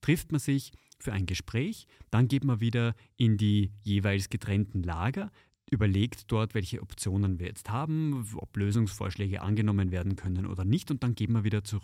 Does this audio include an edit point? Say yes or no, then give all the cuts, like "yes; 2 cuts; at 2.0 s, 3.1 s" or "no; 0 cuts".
no; 0 cuts